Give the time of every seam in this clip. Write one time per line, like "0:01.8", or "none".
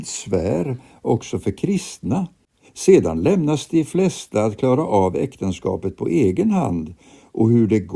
0:02.7

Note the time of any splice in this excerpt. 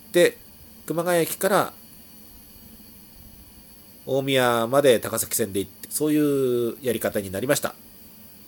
0:05.8

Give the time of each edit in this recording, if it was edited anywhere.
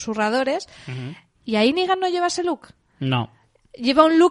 0:01.3

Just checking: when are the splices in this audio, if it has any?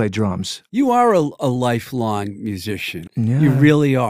0:03.1

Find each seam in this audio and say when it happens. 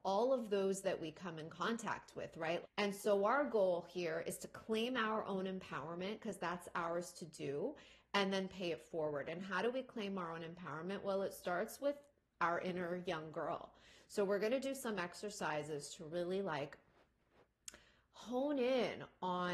0:02.6

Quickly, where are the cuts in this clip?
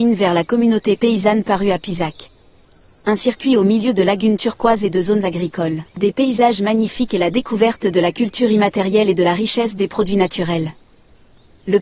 0:01.4
0:05.9

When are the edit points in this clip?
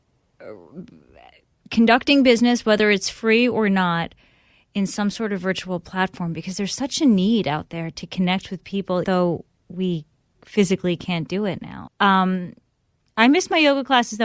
0:09.0
0:11.9

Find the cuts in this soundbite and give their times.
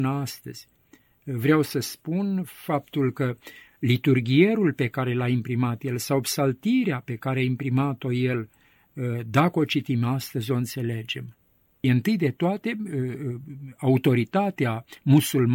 0:11.8

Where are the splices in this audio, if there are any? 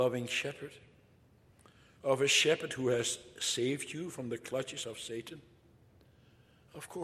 none

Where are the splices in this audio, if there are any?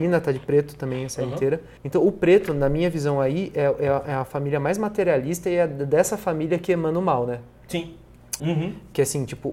0:01.8
0:08.4

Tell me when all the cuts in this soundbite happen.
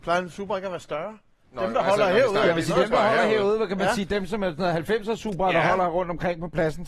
none

